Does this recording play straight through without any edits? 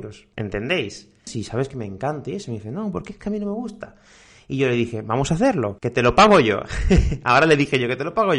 no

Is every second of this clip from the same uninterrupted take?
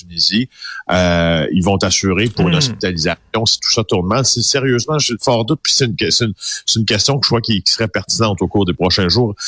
yes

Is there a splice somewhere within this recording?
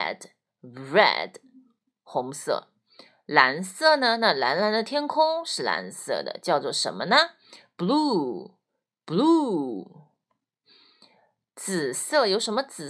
no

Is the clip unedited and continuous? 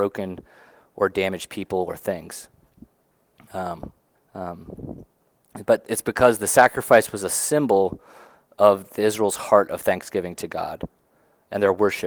no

